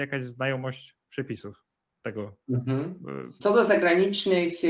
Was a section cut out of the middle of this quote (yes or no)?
yes